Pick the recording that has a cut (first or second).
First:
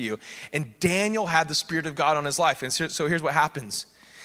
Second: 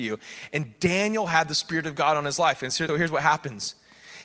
second